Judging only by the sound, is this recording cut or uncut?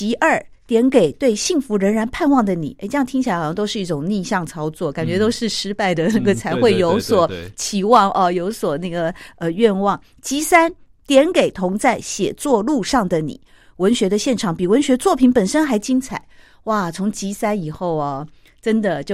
uncut